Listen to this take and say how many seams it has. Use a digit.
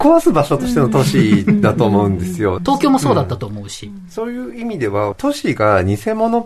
2